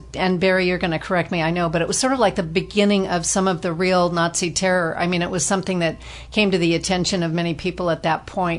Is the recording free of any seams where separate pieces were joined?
yes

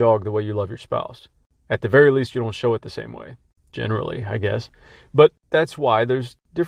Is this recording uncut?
yes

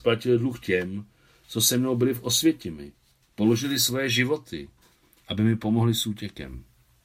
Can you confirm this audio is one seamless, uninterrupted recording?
yes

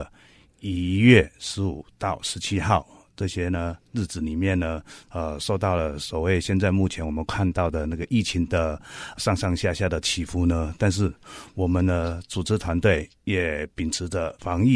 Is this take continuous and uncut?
yes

